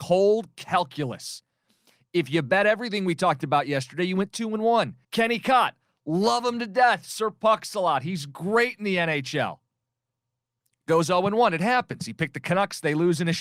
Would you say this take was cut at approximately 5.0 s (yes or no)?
yes